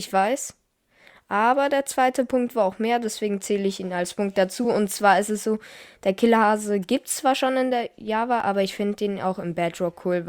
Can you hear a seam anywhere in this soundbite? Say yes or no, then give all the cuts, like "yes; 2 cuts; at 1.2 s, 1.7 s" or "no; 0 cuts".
no; 0 cuts